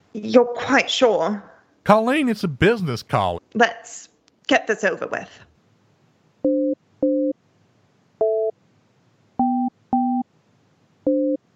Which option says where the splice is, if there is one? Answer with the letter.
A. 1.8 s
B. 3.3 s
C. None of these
B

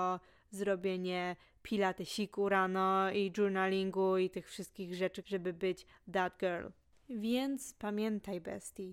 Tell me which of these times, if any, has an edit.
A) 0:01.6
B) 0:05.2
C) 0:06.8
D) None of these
B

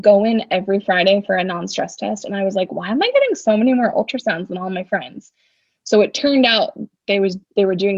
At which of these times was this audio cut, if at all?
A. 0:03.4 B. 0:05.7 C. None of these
C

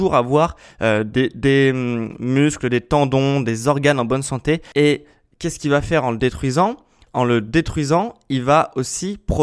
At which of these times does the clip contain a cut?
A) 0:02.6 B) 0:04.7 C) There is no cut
B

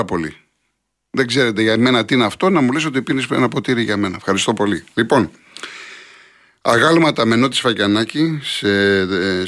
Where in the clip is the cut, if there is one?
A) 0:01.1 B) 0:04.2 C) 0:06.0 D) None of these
D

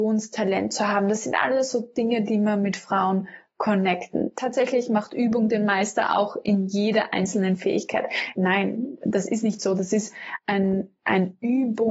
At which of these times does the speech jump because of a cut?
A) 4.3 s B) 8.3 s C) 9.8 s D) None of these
B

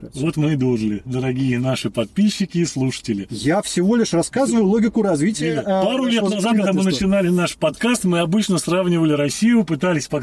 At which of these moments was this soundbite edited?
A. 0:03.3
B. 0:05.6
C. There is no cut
C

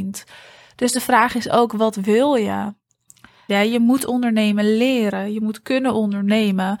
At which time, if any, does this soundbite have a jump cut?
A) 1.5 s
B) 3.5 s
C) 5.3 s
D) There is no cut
B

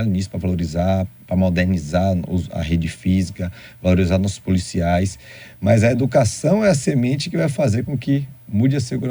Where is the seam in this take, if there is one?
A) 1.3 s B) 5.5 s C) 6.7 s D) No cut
D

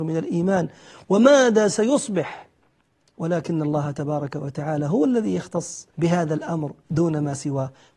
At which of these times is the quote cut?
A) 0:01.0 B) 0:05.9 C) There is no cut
B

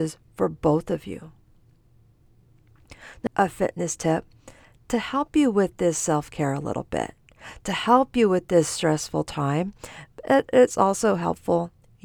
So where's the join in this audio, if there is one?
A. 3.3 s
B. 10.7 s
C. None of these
A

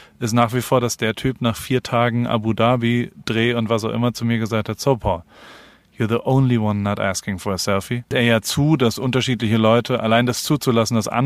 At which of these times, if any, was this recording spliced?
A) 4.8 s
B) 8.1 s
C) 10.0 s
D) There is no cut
B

